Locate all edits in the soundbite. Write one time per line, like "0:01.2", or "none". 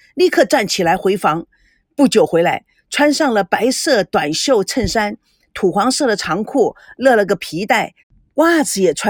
none